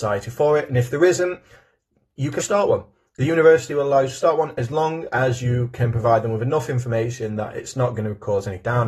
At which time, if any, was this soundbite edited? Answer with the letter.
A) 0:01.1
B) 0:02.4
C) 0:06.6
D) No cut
B